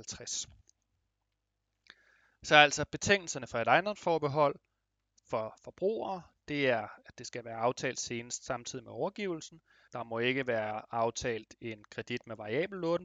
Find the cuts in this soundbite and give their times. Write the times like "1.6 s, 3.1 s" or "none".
9.9 s